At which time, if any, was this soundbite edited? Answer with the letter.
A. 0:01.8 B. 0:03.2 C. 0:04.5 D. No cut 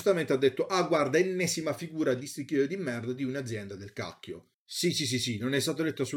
C